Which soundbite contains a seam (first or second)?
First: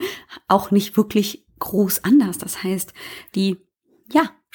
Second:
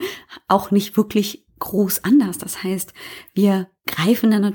first